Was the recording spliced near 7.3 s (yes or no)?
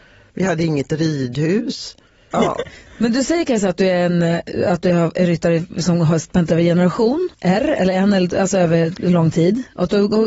yes